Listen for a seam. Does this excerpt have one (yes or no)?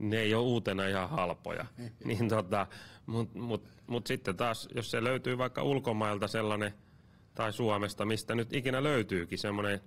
no